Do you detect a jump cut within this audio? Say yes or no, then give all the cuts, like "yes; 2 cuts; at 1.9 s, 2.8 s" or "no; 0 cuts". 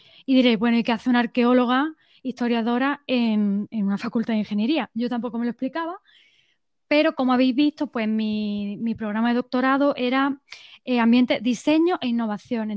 no; 0 cuts